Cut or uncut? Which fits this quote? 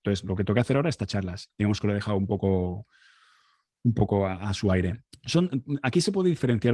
cut